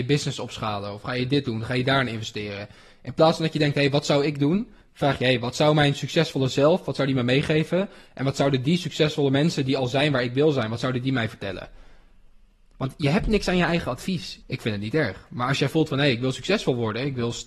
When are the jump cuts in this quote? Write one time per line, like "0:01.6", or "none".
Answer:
0:14.4